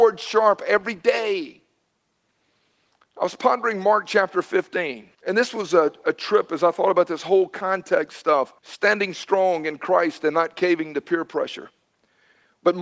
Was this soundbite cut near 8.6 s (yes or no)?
yes